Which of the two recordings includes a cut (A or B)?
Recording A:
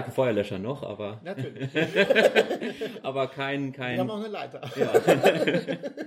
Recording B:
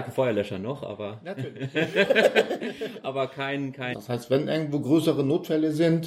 B